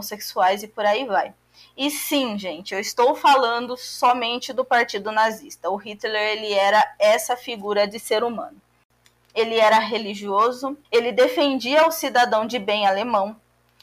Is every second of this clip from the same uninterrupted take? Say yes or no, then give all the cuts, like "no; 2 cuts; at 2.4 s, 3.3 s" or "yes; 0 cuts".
no; 2 cuts; at 9.1 s, 10.8 s